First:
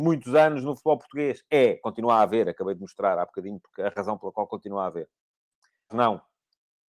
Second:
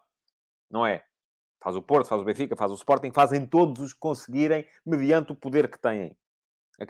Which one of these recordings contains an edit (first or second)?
first